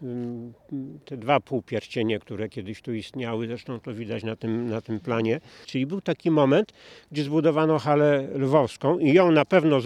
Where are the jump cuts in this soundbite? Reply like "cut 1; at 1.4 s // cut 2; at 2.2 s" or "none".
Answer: cut 1; at 5.6 s